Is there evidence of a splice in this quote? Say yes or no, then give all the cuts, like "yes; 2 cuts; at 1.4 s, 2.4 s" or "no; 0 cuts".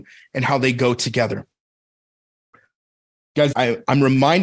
yes; 1 cut; at 3.5 s